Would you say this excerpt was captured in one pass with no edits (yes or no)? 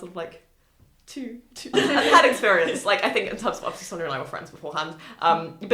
no